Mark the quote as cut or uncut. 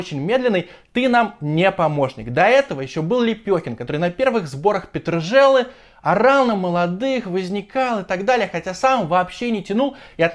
uncut